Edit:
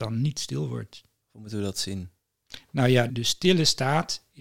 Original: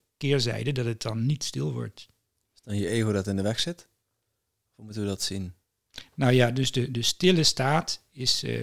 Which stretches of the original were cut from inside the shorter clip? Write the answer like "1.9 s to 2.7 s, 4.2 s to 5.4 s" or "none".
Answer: 2.3 s to 4.6 s, 6.5 s to 6.9 s